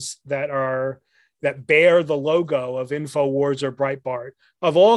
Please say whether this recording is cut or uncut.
uncut